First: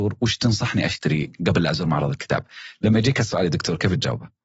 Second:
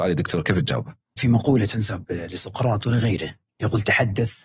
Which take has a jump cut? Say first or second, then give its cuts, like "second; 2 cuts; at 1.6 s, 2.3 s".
second; 1 cut; at 1.2 s